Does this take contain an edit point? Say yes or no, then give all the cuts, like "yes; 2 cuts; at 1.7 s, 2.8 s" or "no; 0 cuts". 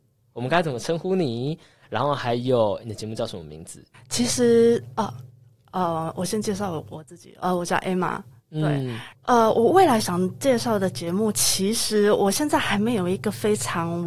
yes; 2 cuts; at 3.9 s, 9.1 s